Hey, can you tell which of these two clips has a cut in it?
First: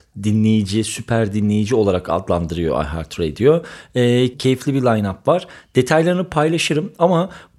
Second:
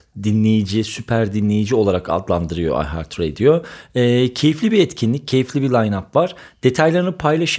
first; 1 cut; at 4.3 s

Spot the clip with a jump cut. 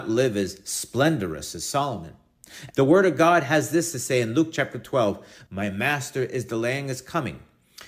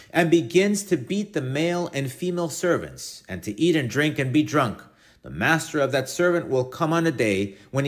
first; 2 cuts; at 2.7 s, 5.5 s

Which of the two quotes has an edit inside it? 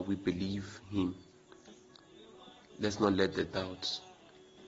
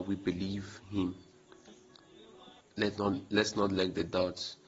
second; 1 cut; at 2.6 s

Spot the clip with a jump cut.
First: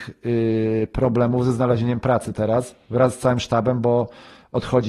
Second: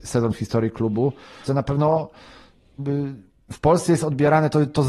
second; 1 cut; at 1.5 s

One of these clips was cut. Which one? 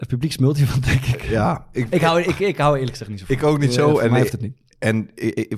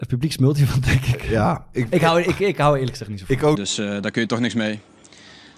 second; 1 cut; at 3.6 s

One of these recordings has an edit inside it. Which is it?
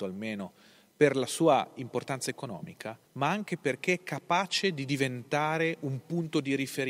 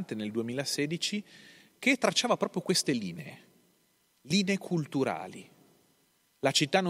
first; 1 cut; at 3.1 s

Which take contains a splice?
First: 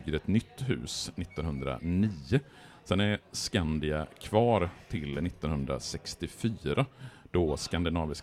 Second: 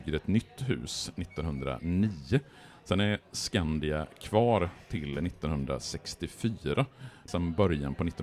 second; 1 cut; at 7.3 s

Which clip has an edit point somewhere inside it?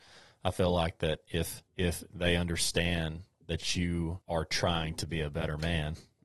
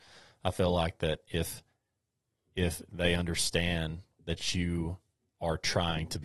first; 2 cuts; at 1.7 s, 4.2 s

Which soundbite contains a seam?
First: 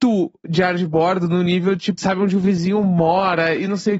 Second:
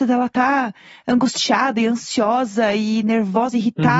first; 1 cut; at 2.0 s

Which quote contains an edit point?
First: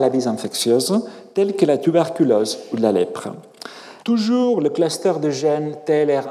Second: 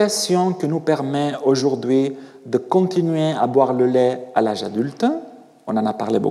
first; 1 cut; at 4.0 s

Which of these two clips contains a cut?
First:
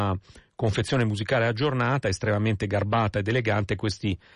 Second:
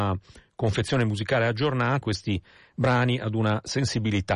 second; 1 cut; at 2.0 s

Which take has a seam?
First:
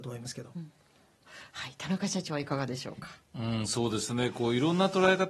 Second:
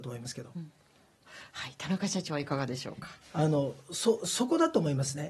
second; 1 cut; at 3.2 s

